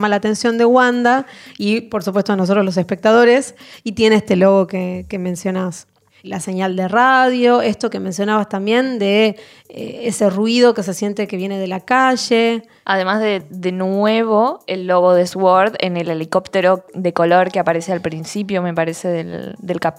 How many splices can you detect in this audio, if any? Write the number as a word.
one